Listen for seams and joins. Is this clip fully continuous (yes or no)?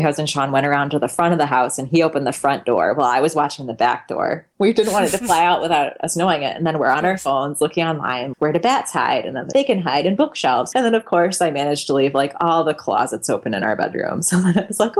no